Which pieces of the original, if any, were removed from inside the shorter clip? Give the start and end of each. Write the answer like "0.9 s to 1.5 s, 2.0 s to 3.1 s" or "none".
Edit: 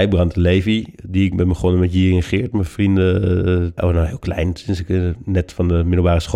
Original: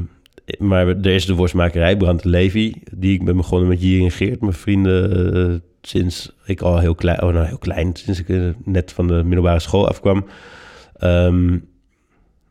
5.7 s to 7.2 s